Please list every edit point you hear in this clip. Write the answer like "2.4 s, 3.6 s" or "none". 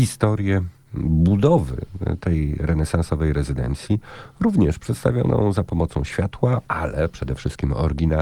none